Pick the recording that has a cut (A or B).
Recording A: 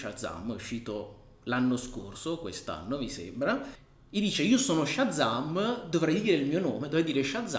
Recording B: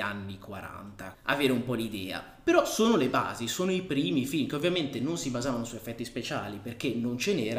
B